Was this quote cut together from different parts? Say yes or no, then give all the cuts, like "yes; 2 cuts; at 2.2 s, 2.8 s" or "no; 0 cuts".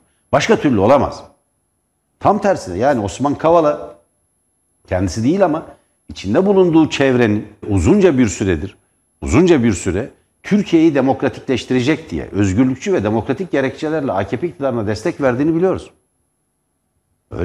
yes; 1 cut; at 7.6 s